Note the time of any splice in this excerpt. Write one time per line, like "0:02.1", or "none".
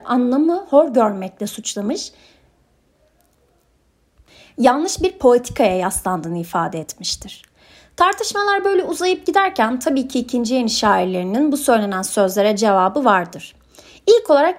none